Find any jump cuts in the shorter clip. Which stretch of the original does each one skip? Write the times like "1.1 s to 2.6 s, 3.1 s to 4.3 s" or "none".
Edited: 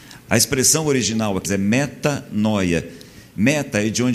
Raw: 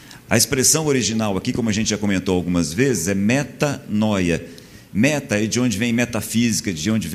1.4 s to 3.0 s